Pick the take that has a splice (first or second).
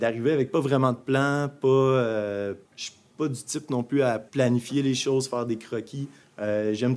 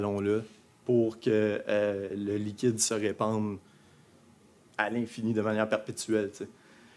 first